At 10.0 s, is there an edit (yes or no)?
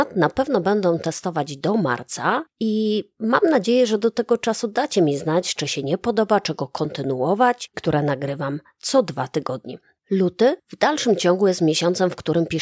yes